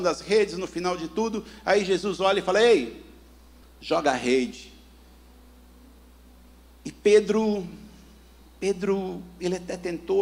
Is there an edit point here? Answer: yes; 1 cut; at 3.6 s

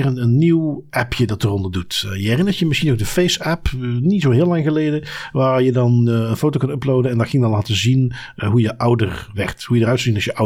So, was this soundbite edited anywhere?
no; 0 cuts

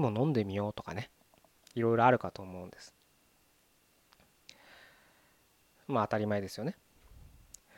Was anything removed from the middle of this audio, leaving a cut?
no; 0 cuts

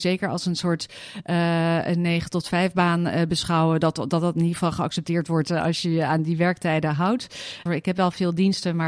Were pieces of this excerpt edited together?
yes; 1 cut; at 7.7 s

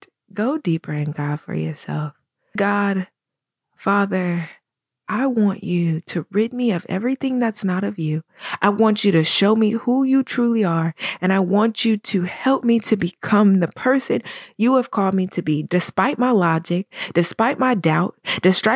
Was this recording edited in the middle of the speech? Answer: yes; 1 cut; at 2.6 s

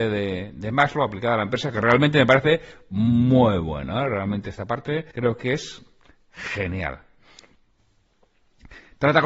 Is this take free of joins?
no; 1 cut; at 5.1 s

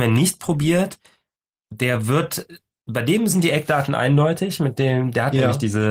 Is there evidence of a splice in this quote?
no; 0 cuts

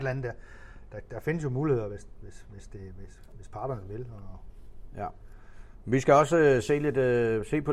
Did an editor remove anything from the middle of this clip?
no; 0 cuts

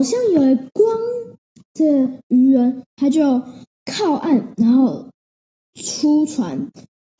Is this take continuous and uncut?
no; 1 cut; at 1.5 s

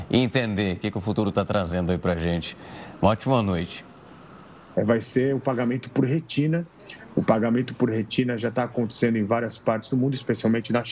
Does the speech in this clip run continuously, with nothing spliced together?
no; 1 cut; at 4.7 s

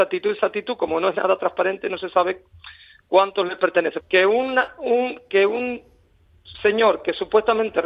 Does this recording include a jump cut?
yes; 1 cut; at 4.0 s

